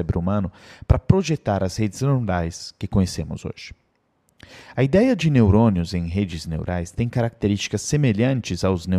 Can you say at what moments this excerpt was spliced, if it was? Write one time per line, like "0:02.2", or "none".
none